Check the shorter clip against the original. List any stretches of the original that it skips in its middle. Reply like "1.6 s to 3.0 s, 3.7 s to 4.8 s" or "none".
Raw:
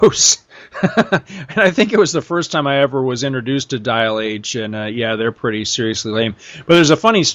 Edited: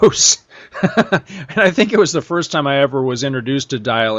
none

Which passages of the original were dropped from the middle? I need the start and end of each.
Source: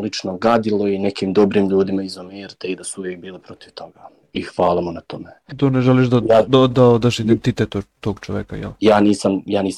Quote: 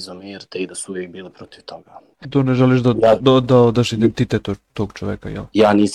4.2 s to 5.4 s

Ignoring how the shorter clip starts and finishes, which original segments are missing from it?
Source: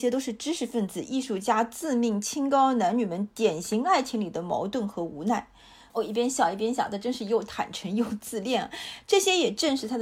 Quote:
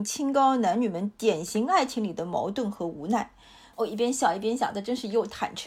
none

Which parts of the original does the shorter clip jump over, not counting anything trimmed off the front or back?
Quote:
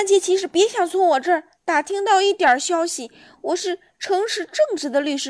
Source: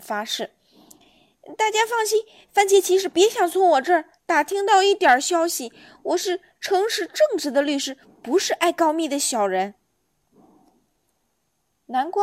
none

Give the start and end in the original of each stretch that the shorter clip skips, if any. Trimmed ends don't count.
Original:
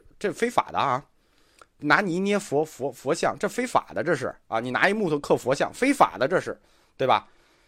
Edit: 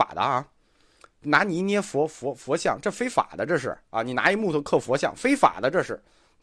none

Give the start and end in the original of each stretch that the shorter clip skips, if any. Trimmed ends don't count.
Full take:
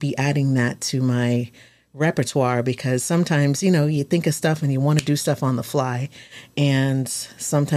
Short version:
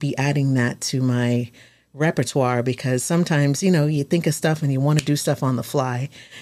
none

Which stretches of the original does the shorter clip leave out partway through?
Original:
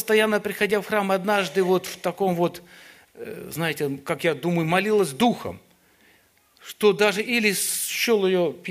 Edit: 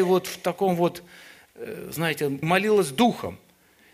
4.0 s to 4.6 s

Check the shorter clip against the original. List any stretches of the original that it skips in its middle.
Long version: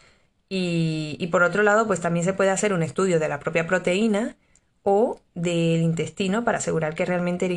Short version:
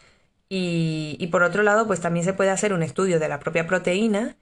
none

